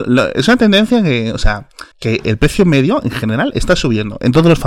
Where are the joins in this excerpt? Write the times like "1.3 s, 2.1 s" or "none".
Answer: 1.9 s